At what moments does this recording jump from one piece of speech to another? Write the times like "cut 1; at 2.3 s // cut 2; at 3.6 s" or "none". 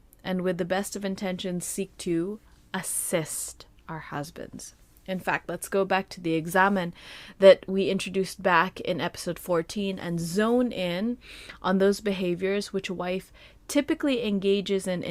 none